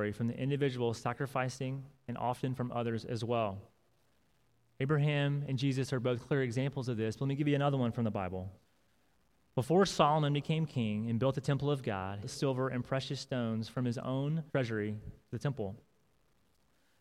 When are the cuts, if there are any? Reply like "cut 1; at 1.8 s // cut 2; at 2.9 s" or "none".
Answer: cut 1; at 12.2 s // cut 2; at 14.5 s